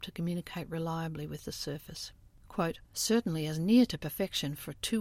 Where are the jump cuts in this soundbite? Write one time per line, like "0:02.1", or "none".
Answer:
0:02.9